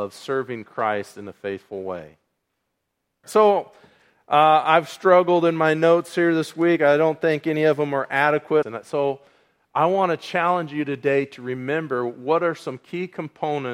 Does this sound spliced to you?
yes; 2 cuts; at 3.2 s, 8.6 s

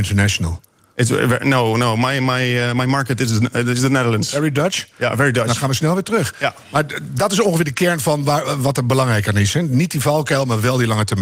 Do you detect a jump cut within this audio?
no; 0 cuts

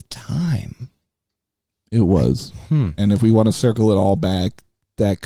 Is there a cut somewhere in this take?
no; 0 cuts

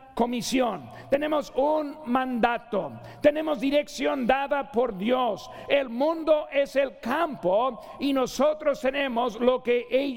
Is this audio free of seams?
yes; 0 cuts

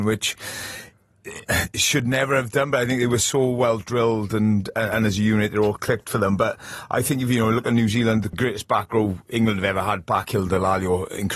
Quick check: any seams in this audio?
yes; 1 cut; at 8.3 s

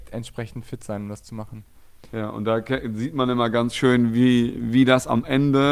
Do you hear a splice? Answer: no; 0 cuts

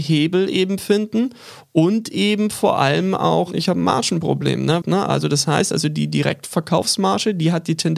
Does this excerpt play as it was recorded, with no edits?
no; 1 cut; at 4.8 s

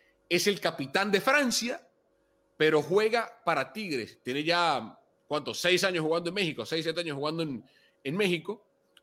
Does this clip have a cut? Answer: no; 0 cuts

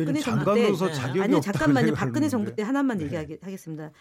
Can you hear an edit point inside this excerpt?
no; 0 cuts

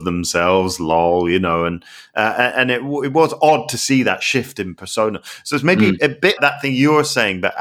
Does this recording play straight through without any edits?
no; 1 cut; at 6.4 s

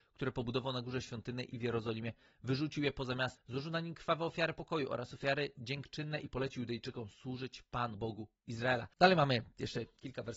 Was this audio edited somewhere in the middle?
yes; 2 cuts; at 3.4 s, 8.9 s

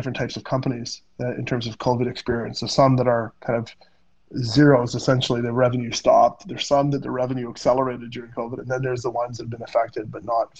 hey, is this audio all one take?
yes; 0 cuts

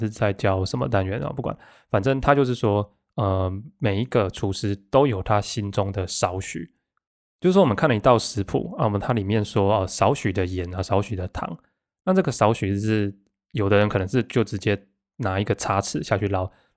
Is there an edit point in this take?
no; 0 cuts

